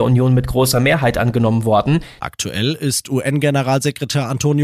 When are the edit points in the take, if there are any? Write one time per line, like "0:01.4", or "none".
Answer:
0:02.2